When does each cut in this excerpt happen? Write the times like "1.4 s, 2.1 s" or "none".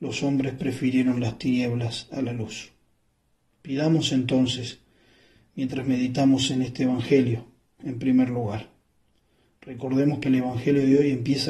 7.8 s